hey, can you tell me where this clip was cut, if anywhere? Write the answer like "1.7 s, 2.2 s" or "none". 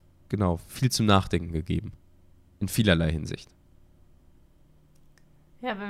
none